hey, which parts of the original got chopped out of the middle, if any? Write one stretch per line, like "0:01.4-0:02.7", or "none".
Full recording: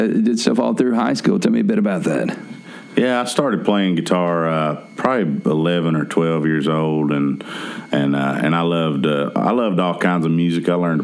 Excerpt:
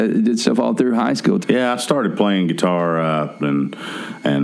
0:01.4-0:02.9
0:04.9-0:07.1